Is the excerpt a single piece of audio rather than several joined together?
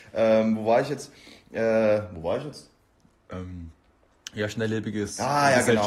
yes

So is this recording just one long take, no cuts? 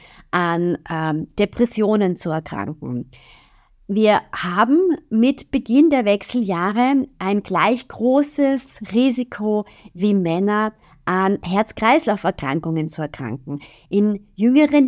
yes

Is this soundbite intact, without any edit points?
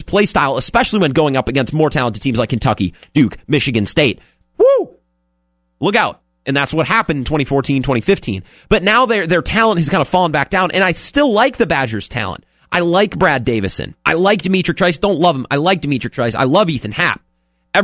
no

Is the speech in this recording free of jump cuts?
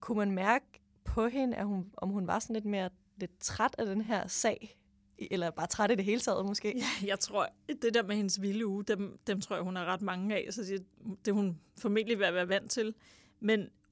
yes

